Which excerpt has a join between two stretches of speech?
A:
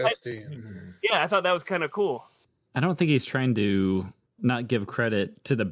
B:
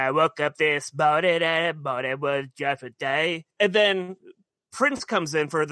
A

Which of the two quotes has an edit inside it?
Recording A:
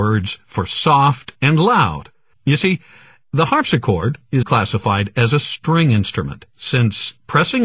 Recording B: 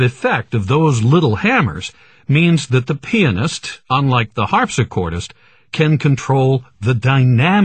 A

